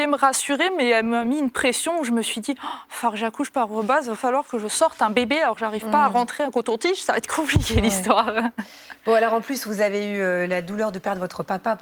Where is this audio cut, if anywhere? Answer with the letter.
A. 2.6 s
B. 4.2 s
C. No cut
B